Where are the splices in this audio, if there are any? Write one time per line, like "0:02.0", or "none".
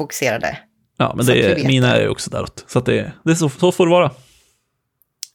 none